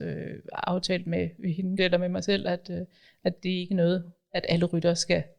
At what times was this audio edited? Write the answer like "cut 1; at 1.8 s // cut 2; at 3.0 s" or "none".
cut 1; at 1.8 s